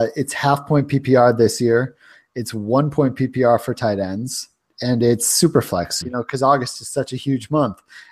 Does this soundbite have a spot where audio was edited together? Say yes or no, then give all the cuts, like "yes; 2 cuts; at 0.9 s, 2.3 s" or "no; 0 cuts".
yes; 2 cuts; at 4.7 s, 6.0 s